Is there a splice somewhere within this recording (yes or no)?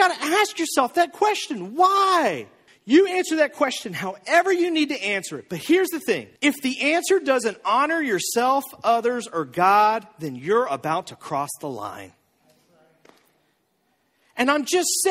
yes